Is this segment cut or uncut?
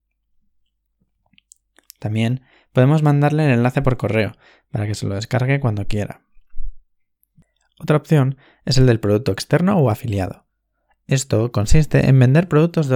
uncut